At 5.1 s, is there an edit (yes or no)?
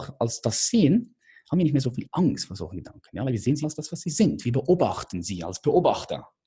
no